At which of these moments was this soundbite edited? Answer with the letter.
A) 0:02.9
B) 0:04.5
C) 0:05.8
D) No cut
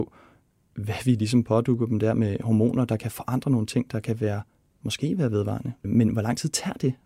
C